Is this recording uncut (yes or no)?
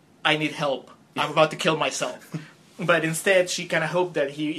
yes